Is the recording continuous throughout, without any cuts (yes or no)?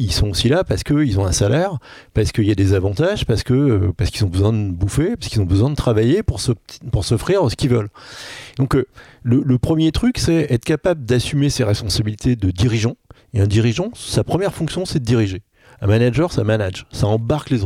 yes